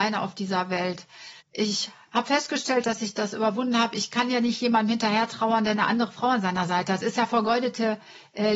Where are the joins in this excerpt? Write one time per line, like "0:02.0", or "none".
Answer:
0:01.4